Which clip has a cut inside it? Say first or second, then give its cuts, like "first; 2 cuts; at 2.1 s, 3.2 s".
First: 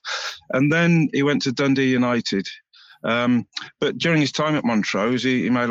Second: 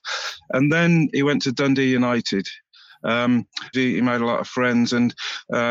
second; 1 cut; at 3.7 s